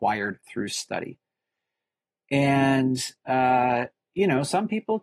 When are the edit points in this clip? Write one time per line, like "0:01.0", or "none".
none